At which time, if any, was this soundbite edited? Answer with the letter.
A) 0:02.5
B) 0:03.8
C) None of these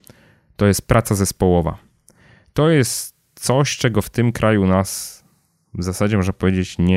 C